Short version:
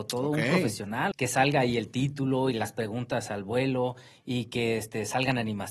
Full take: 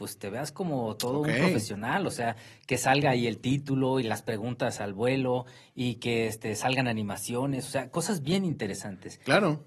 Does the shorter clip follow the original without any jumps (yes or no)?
no